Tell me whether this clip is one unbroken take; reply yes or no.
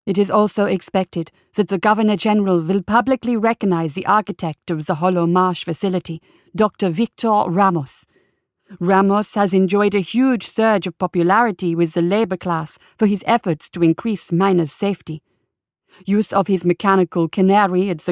yes